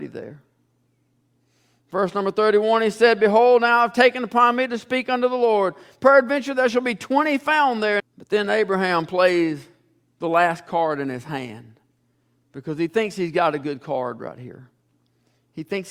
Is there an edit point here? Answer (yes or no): yes